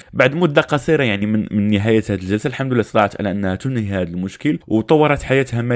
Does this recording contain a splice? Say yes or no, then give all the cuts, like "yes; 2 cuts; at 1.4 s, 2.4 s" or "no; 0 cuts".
no; 0 cuts